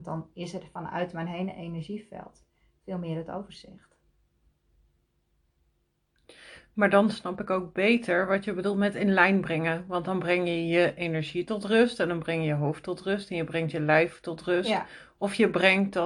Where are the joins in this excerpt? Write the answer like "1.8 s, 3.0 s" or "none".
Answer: none